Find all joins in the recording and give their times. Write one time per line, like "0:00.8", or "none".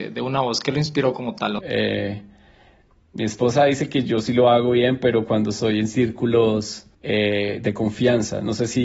0:01.6
0:06.9